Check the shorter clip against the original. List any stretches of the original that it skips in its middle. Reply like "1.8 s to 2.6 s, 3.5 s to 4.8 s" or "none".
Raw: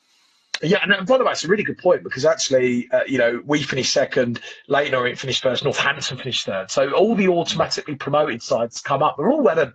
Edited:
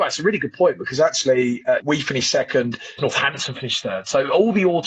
3.1 s to 3.4 s, 4.6 s to 5.6 s